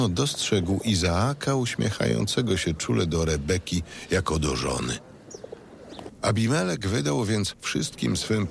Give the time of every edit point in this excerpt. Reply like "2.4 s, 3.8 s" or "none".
6.1 s